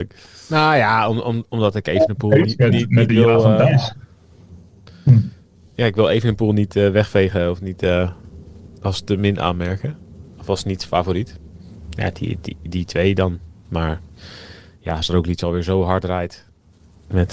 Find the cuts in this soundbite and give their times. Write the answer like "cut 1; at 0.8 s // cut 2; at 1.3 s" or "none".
none